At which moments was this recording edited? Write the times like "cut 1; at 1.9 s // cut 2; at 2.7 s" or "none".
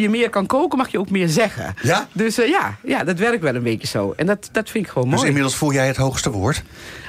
none